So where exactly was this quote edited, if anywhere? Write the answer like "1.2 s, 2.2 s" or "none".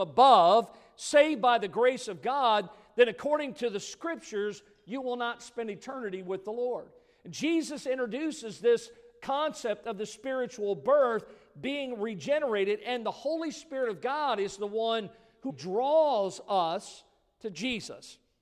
15.5 s